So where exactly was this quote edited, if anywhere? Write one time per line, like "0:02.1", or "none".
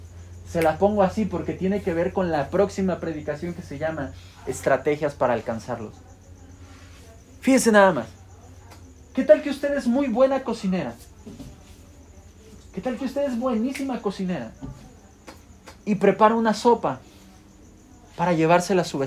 none